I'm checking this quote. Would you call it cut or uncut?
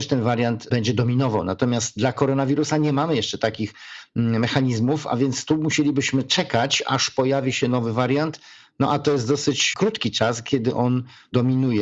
uncut